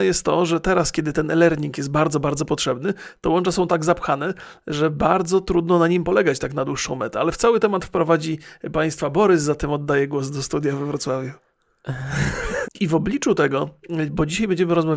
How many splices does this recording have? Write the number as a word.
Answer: one